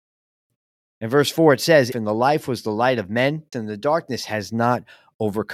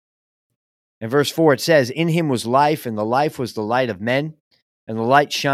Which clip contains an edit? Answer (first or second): first